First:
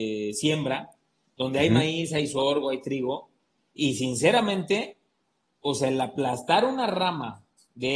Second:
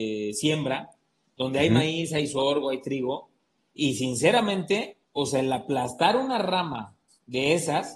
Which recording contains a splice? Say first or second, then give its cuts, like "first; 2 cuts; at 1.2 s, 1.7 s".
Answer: second; 1 cut; at 5.0 s